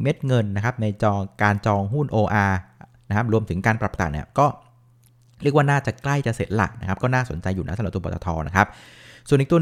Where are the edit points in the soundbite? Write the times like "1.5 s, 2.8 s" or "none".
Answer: 4.0 s